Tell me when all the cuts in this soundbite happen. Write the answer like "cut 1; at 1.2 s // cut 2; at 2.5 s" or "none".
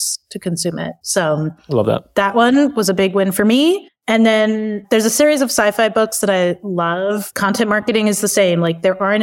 cut 1; at 7.3 s